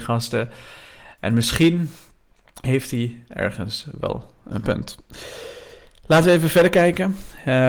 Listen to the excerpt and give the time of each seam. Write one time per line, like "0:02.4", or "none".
none